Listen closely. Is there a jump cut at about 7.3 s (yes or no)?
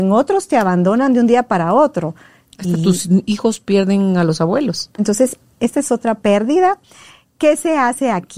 no